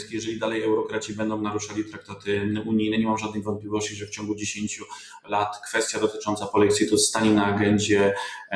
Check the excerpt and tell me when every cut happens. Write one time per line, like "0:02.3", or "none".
none